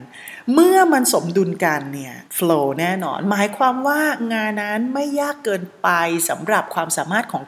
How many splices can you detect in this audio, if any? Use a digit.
2